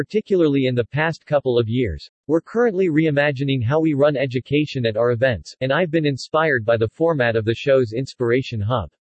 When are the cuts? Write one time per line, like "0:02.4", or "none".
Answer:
0:02.1
0:05.6